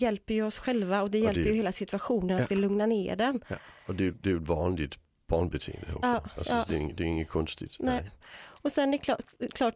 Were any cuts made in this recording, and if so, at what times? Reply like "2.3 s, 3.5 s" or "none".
none